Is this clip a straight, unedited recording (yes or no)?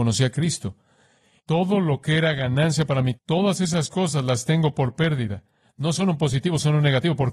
no